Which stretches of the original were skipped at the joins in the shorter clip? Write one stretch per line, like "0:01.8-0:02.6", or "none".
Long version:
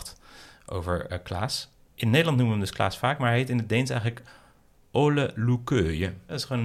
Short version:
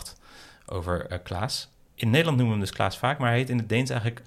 none